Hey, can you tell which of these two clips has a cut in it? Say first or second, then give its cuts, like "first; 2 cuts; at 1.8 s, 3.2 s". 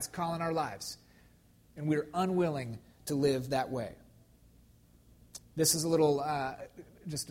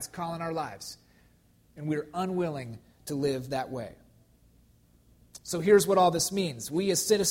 first; 1 cut; at 5.4 s